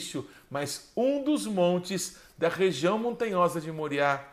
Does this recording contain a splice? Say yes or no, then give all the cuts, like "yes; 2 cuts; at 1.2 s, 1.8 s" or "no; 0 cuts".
no; 0 cuts